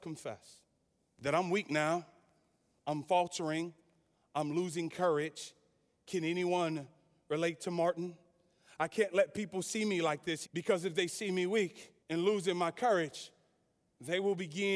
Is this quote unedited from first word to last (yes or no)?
no